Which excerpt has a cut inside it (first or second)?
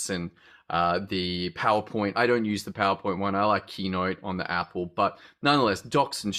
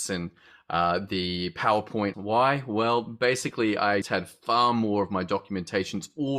second